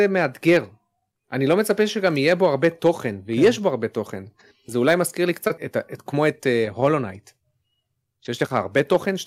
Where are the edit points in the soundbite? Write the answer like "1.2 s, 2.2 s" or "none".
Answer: 5.6 s